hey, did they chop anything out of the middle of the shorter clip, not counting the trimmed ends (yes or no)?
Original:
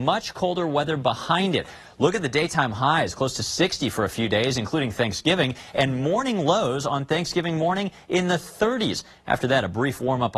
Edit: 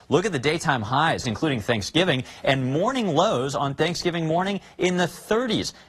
yes